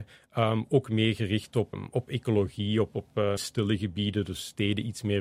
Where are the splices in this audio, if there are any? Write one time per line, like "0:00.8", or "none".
0:01.7
0:03.4

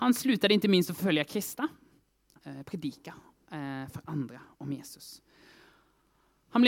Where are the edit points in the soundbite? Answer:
0:02.4

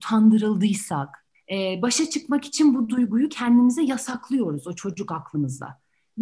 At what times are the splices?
0:01.3

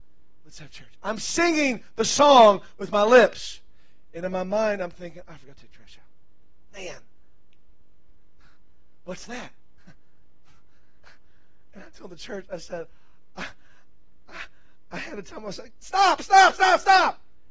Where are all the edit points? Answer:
none

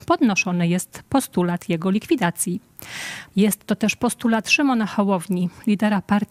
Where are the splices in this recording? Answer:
0:03.3

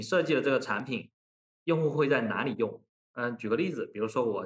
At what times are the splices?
none

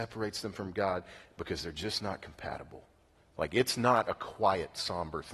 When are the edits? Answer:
0:03.1

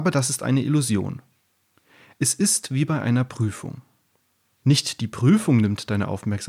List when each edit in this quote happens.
0:04.6

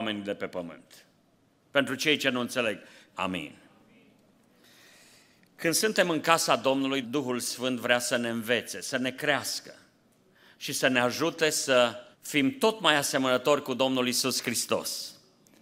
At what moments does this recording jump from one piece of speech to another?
0:03.1
0:07.0
0:12.1

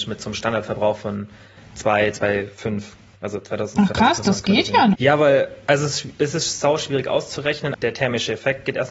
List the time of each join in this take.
0:04.9
0:07.7

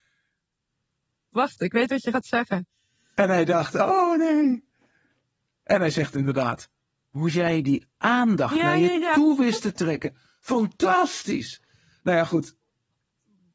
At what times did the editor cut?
0:01.3

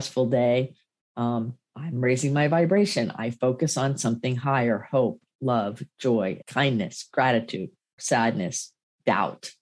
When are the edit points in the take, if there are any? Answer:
0:06.4
0:08.0

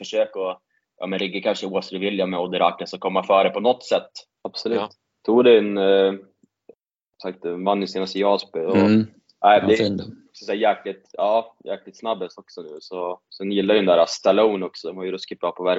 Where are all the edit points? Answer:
0:04.3

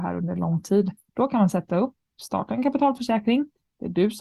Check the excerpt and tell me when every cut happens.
none

